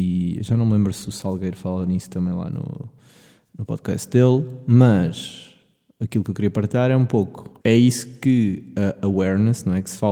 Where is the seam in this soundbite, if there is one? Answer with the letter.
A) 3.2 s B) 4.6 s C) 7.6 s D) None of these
C